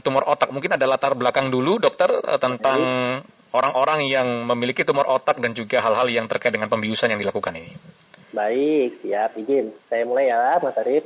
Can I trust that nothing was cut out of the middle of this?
yes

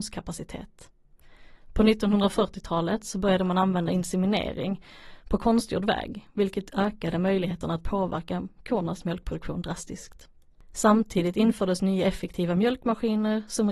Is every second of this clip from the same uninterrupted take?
no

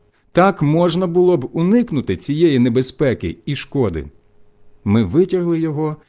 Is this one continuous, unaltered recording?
no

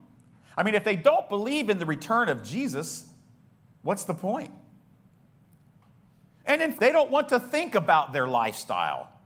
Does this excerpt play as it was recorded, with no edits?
no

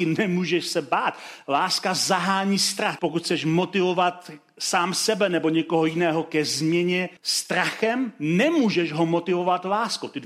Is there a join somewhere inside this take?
yes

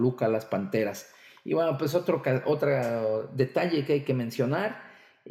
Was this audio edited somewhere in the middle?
no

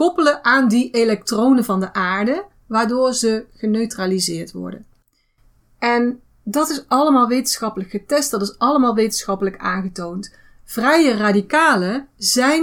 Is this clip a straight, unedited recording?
yes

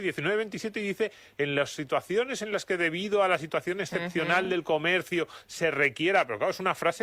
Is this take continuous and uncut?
yes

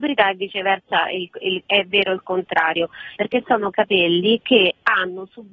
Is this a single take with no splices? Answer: no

